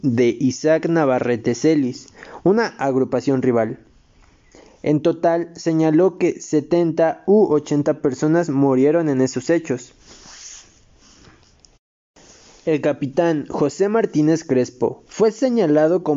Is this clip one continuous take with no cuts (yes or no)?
no